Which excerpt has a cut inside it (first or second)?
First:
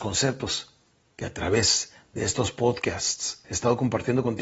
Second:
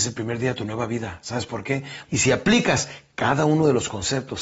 second